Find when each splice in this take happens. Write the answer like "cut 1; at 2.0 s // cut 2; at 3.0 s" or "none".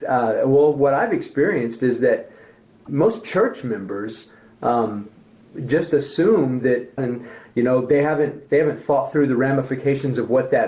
cut 1; at 7.0 s